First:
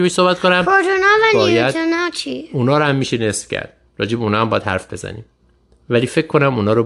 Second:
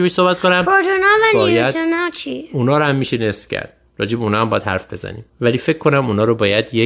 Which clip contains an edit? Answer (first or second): second